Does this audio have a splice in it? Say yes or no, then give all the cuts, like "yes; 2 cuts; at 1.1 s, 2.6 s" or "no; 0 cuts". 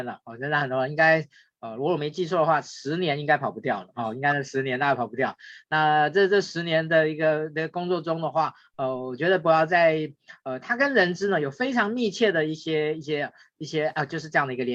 no; 0 cuts